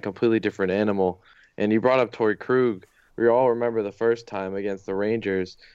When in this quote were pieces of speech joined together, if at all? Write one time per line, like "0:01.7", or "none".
0:03.1